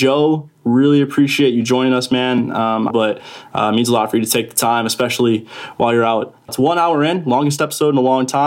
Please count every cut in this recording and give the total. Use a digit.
2